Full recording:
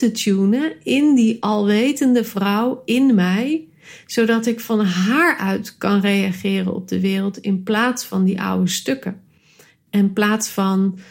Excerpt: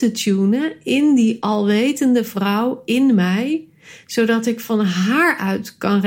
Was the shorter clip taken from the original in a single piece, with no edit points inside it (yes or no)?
yes